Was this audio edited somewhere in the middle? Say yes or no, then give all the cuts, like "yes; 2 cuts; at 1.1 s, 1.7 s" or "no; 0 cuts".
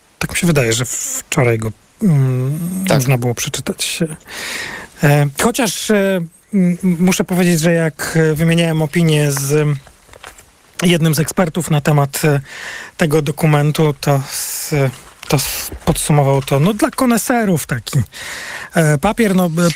no; 0 cuts